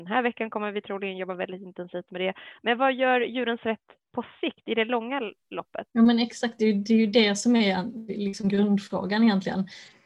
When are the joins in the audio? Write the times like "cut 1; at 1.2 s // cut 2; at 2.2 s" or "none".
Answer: cut 1; at 5.9 s